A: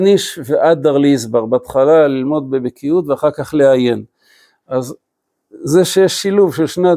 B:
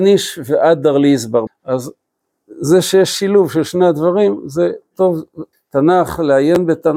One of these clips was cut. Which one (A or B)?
B